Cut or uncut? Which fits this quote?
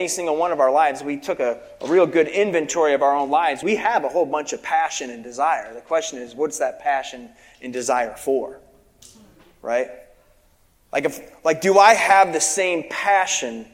uncut